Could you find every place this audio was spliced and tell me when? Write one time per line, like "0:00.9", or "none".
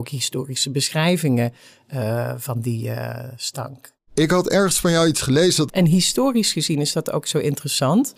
0:05.7

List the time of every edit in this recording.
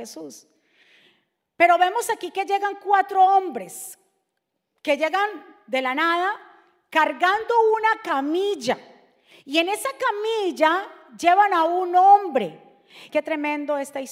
0:13.1

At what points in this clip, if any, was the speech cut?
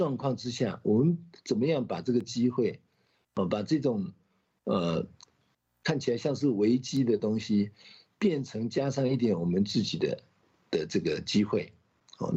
none

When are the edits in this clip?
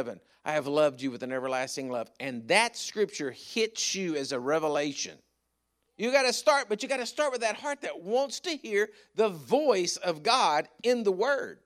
0:05.9

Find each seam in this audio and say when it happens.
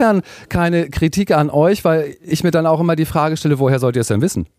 none

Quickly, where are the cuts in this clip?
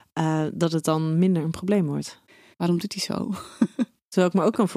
0:02.5

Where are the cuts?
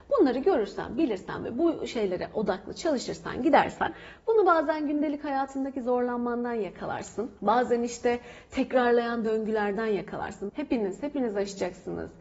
0:07.4
0:10.5

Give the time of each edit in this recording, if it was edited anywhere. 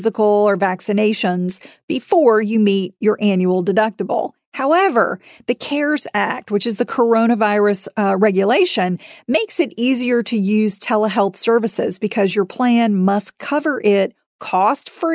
none

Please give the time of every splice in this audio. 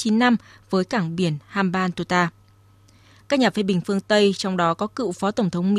none

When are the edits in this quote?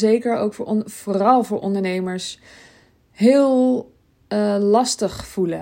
none

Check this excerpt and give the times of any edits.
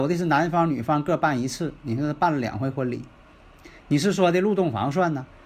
none

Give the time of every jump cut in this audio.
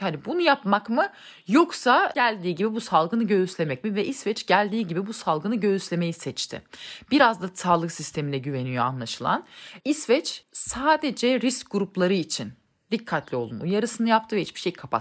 none

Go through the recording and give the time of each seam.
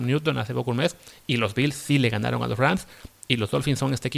0:03.1

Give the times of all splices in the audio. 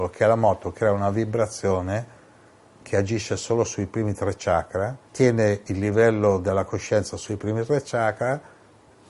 0:05.1

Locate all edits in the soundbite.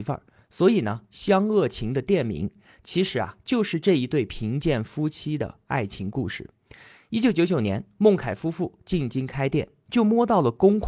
none

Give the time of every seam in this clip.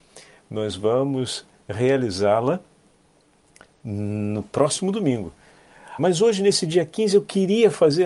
0:06.0

